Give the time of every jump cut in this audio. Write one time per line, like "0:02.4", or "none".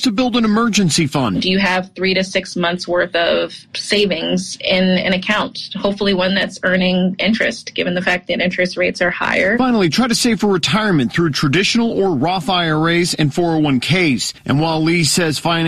none